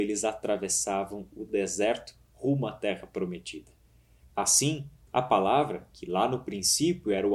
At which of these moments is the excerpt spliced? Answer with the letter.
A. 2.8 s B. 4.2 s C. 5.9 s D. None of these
B